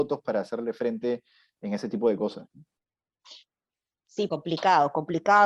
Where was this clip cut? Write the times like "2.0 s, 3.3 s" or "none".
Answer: 4.3 s